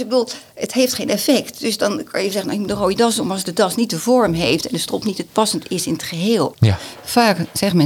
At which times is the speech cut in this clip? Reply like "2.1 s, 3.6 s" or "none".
5.3 s, 6.5 s